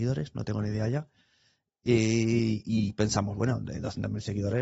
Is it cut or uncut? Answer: uncut